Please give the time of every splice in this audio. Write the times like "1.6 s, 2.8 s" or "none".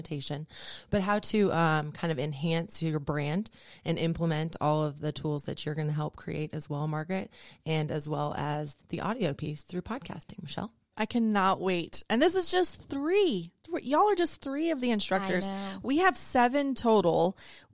10.9 s